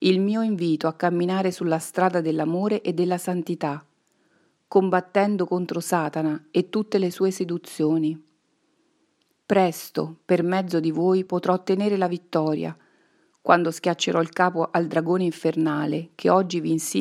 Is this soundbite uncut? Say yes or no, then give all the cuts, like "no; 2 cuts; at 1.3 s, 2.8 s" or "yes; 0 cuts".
yes; 0 cuts